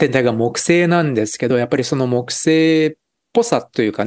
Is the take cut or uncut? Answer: uncut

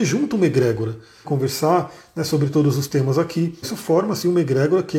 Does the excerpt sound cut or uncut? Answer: cut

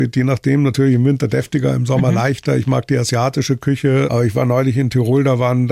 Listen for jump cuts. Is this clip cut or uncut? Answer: uncut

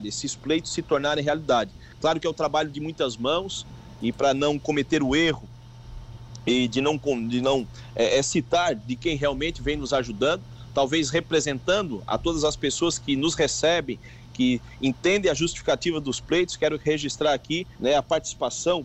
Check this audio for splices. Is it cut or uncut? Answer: cut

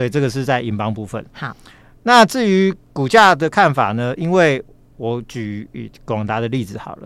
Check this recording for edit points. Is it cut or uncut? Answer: uncut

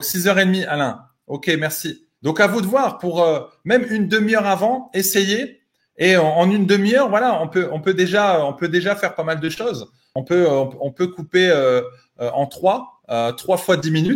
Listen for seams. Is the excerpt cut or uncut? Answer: cut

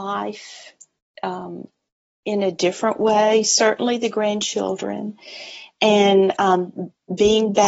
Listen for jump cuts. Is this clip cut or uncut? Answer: uncut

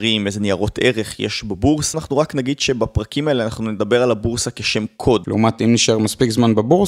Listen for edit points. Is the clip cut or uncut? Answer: cut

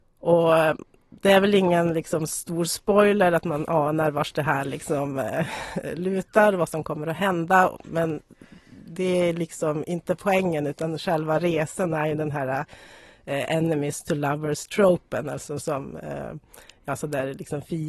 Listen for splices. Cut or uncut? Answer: uncut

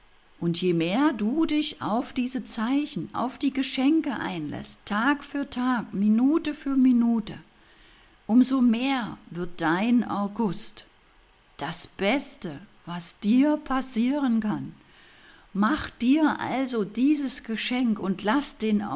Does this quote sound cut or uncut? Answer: uncut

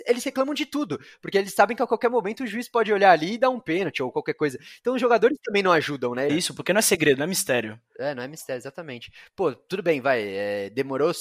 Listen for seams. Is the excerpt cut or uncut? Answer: cut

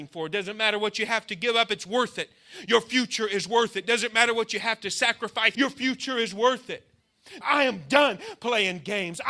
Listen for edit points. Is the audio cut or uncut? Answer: cut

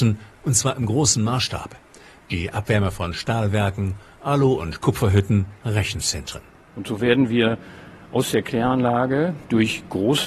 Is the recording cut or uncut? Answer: cut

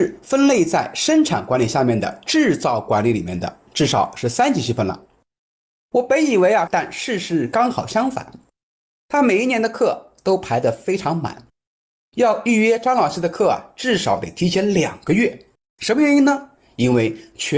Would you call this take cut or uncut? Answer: cut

